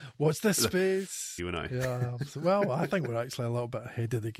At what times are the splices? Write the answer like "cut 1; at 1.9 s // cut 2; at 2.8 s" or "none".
cut 1; at 1.4 s

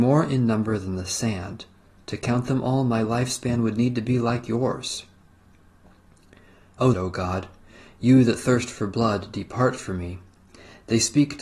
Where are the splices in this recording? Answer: cut 1; at 6.9 s

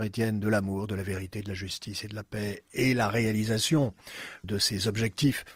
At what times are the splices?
cut 1; at 4.4 s

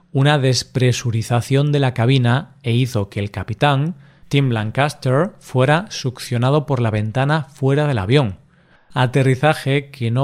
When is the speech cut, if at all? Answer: cut 1; at 8.8 s

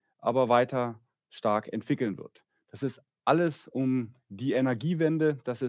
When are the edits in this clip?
none

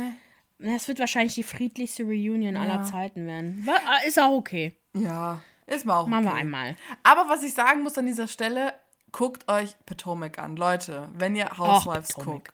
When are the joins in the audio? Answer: none

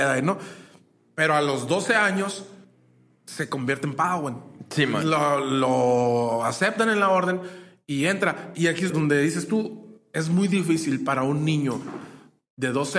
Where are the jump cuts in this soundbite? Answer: cut 1; at 8.9 s

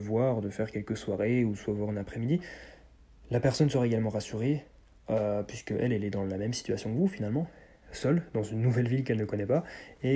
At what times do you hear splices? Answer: none

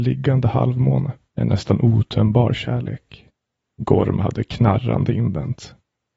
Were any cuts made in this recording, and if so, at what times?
cut 1; at 1.3 s // cut 2; at 3.6 s

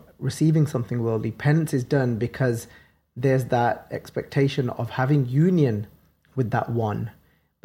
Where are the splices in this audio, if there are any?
none

